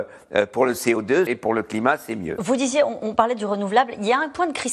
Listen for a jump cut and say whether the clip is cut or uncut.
cut